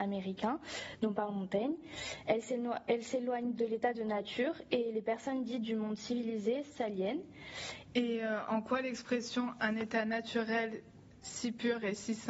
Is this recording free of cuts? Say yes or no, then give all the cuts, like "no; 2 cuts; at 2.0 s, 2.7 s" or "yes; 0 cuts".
no; 2 cuts; at 3.6 s, 7.9 s